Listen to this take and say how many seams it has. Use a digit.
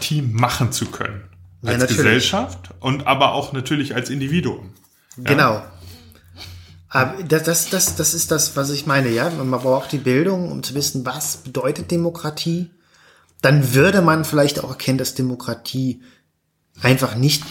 0